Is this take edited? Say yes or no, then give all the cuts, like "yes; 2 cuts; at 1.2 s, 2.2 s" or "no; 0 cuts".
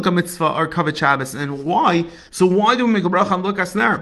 yes; 1 cut; at 2.3 s